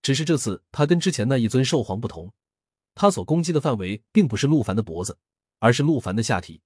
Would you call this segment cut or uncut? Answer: uncut